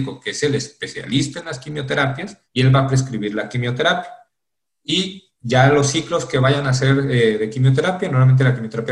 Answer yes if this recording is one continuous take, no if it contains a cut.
no